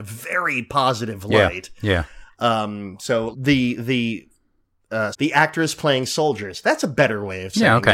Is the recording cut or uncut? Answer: cut